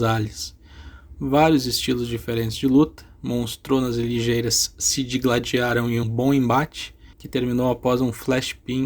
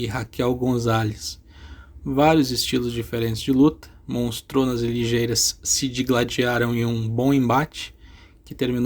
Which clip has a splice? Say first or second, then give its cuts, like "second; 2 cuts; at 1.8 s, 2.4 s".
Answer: first; 2 cuts; at 6.0 s, 7.1 s